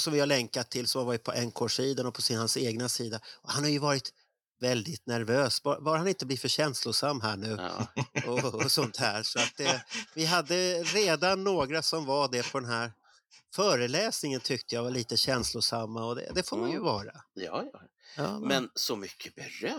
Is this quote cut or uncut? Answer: cut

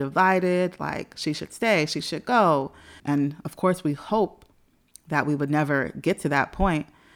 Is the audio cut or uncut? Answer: cut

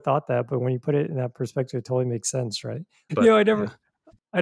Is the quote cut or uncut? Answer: cut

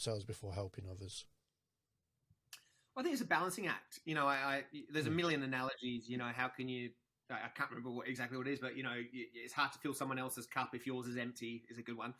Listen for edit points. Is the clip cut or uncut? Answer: uncut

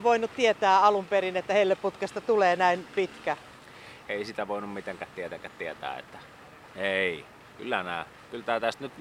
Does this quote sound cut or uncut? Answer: cut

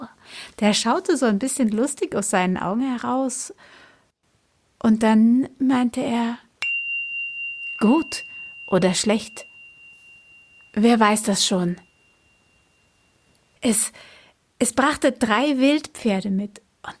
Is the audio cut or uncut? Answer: cut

